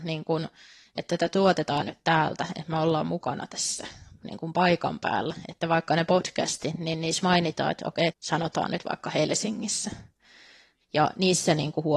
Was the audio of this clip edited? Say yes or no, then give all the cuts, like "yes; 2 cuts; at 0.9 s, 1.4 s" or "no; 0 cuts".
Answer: yes; 2 cuts; at 8.1 s, 10.8 s